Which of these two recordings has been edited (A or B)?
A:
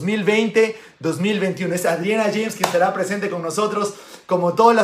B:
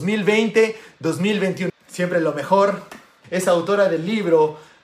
B